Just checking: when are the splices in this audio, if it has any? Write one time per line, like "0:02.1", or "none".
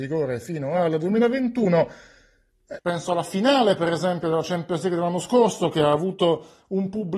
0:02.8